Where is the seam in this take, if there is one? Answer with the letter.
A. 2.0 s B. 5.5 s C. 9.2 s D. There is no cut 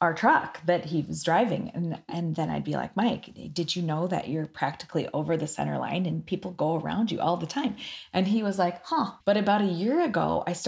C